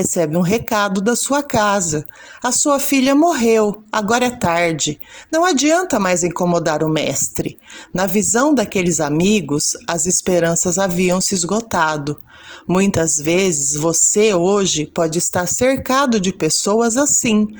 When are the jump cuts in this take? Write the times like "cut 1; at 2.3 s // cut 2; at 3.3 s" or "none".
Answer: none